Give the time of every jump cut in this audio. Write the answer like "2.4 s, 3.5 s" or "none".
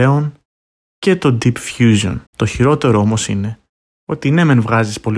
2.3 s